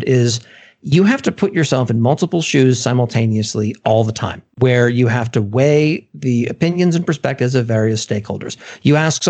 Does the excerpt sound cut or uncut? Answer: cut